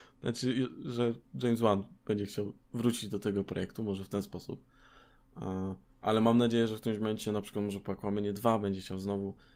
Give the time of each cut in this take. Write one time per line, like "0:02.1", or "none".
0:05.2